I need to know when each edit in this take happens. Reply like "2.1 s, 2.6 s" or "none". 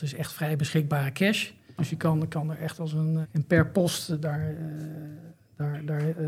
1.8 s, 3.2 s